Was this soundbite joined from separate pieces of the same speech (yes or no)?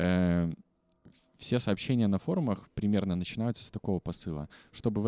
no